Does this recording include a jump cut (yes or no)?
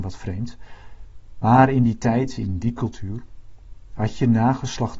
no